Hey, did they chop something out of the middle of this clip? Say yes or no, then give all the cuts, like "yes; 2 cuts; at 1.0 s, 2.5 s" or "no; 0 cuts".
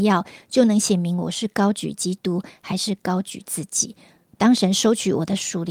no; 0 cuts